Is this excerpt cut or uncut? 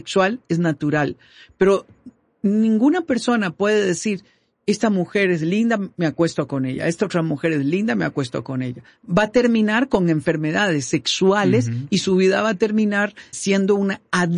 cut